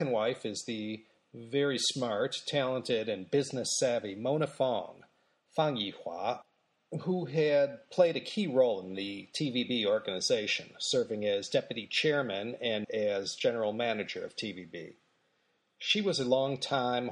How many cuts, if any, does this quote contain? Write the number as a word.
one